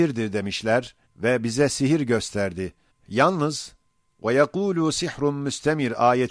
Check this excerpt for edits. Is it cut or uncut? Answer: cut